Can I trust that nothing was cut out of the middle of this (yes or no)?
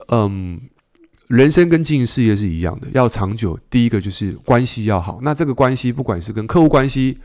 yes